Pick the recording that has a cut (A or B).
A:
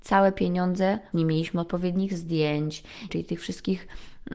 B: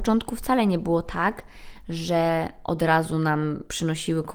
A